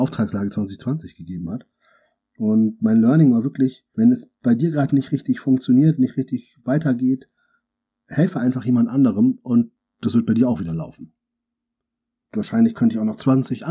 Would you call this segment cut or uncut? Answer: uncut